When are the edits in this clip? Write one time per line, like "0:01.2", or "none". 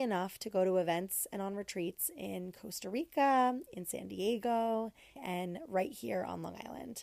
0:05.2